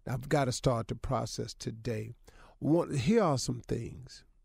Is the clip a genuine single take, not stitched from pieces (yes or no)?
yes